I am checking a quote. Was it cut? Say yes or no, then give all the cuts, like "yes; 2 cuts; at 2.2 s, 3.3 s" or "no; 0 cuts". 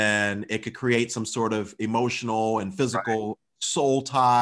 no; 0 cuts